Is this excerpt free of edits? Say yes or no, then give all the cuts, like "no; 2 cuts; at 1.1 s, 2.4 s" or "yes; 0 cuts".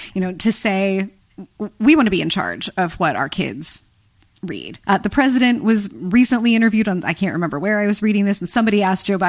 no; 1 cut; at 4.8 s